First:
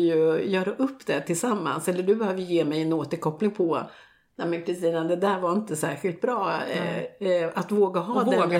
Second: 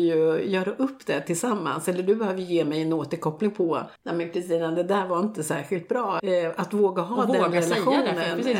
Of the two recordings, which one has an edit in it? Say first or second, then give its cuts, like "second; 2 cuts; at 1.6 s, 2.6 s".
second; 2 cuts; at 4.0 s, 6.2 s